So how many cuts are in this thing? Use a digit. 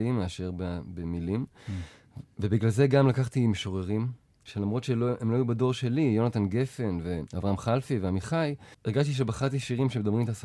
1